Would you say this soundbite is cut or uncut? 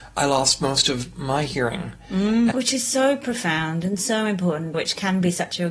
cut